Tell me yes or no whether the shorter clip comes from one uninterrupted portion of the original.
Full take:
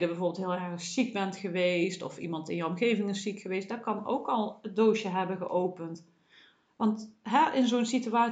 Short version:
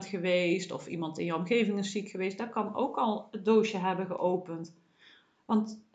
yes